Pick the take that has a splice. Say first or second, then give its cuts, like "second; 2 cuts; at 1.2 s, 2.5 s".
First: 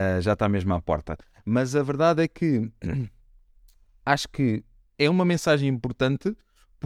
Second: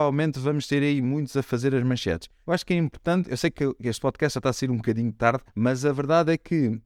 second; 2 cuts; at 2.4 s, 5.5 s